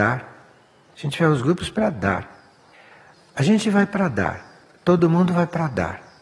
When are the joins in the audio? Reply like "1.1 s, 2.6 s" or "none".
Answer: none

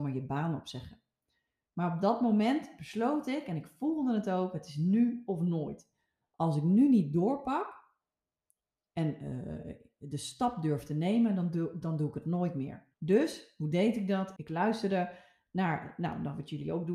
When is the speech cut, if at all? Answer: 12.9 s, 14.4 s

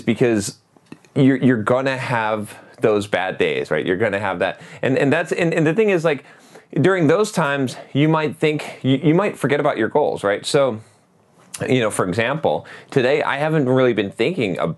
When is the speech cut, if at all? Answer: none

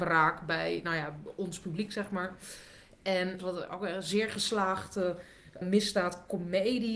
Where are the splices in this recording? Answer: 3.4 s, 5.6 s

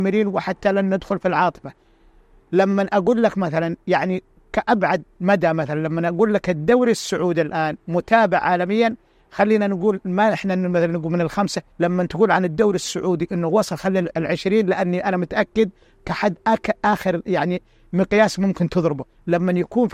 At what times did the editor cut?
11.7 s, 14.1 s

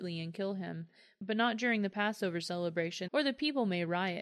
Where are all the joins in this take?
3.1 s

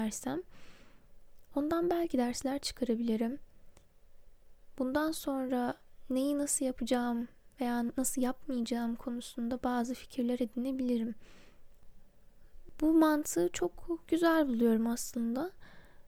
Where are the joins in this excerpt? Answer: none

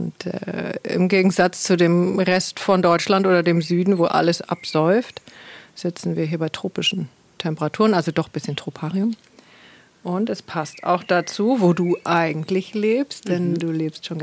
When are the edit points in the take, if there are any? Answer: none

